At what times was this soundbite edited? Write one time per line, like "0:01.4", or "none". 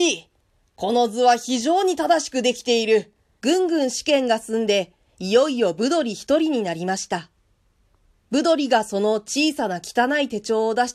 0:03.4